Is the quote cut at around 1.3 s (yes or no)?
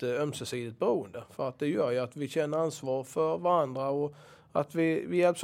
no